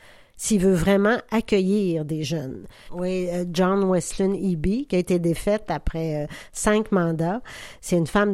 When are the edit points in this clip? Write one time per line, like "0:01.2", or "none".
0:02.9
0:04.9

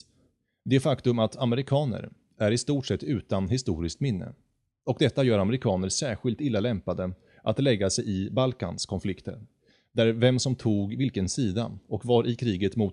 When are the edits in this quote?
none

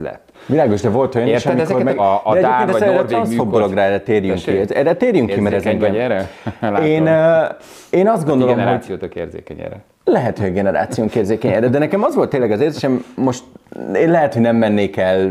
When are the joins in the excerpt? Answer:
0:02.0

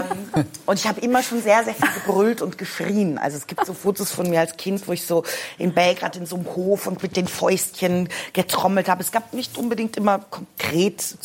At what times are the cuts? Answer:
0:07.0

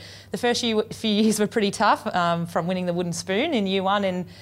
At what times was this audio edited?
none

